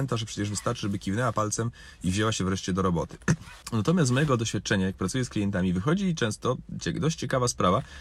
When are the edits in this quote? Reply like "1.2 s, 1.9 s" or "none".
3.6 s